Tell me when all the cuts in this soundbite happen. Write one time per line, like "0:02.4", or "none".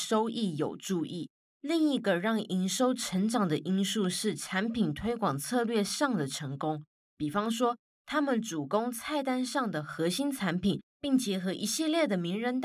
0:10.9